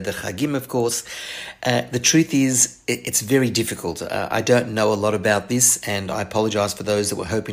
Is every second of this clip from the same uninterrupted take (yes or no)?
yes